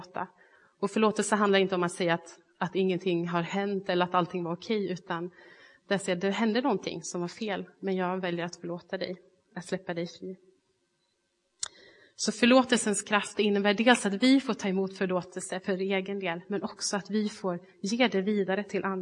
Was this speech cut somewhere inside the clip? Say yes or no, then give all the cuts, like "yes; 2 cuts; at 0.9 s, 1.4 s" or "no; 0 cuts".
no; 0 cuts